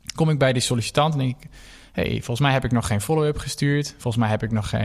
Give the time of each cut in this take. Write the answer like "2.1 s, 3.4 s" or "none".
none